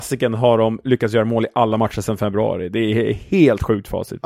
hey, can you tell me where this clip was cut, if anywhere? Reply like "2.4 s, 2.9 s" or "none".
none